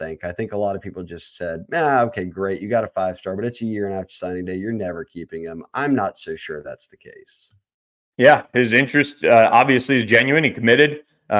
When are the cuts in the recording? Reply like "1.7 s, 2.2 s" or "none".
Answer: none

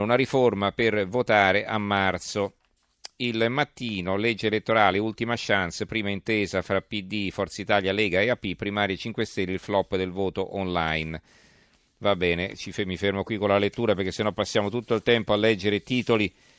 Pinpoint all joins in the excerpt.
none

